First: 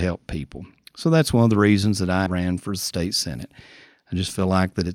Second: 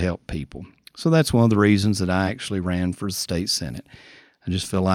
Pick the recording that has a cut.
first; 1 cut; at 2.3 s

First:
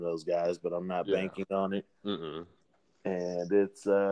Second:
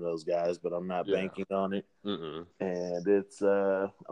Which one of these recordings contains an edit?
second; 1 cut; at 2.5 s

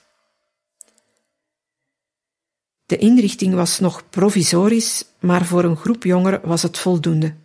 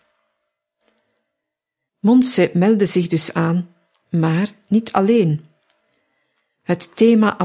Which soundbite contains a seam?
second; 1 cut; at 1.9 s

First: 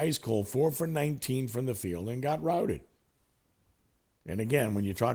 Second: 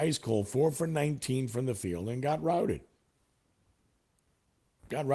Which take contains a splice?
first; 1 cut; at 4.1 s

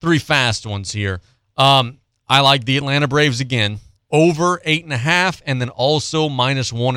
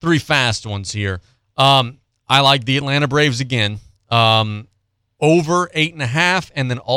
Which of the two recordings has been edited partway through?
first; 1 cut; at 4.0 s

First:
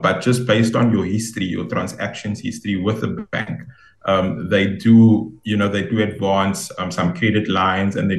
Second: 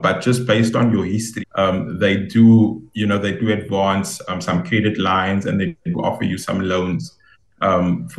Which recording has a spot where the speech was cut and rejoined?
second; 1 cut; at 1.4 s

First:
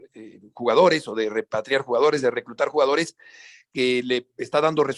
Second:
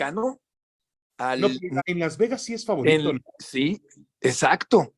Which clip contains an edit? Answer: second; 1 cut; at 1.8 s

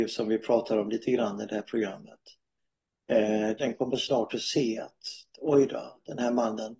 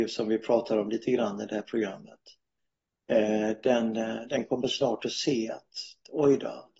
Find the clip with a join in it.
first; 1 cut; at 3.6 s

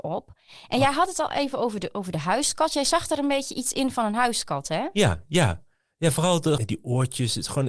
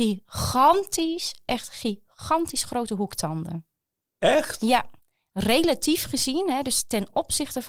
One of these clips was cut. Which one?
first; 1 cut; at 6.6 s

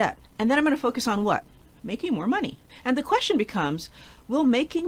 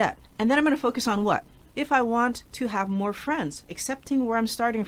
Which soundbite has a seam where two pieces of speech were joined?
second; 1 cut; at 1.7 s

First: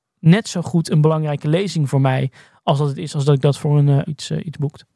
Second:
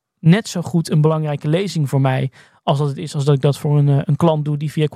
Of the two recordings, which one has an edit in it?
first; 1 cut; at 4.1 s

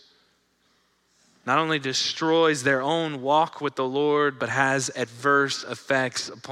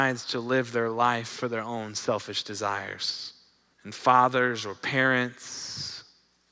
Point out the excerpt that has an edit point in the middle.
second; 1 cut; at 3.7 s

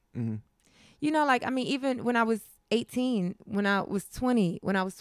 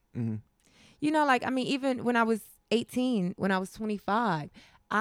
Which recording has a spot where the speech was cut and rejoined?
second; 1 cut; at 3.3 s

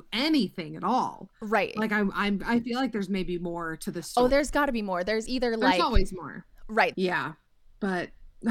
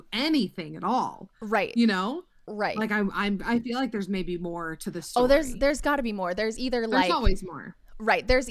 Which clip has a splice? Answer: first; 3 cuts; at 1.7 s, 4.3 s, 6.9 s

